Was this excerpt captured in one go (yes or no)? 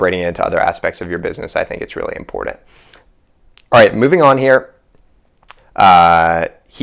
no